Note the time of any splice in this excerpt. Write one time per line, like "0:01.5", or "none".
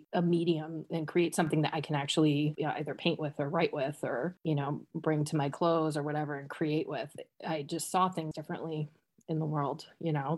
0:02.6